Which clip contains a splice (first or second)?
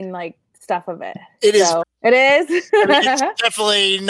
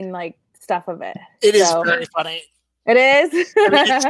first